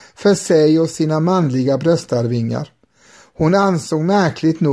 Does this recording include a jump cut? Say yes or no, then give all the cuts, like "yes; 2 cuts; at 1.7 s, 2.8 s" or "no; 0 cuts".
no; 0 cuts